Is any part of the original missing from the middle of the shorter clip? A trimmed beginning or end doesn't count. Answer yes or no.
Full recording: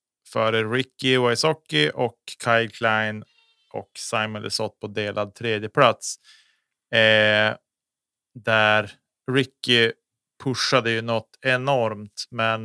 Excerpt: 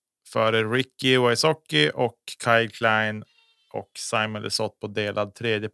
no